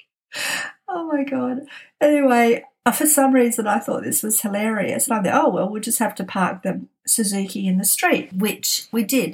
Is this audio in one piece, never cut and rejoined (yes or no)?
yes